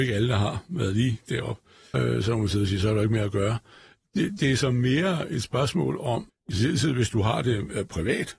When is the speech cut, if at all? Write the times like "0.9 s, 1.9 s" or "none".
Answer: 1.9 s, 6.3 s